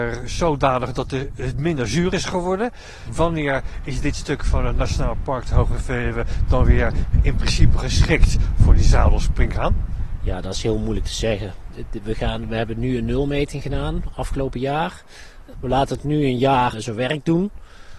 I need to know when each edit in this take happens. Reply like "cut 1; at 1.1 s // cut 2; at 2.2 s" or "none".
cut 1; at 15.5 s // cut 2; at 16.7 s